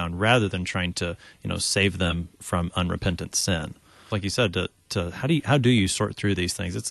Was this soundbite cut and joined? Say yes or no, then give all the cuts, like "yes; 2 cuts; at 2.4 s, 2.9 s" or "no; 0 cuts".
yes; 1 cut; at 4.1 s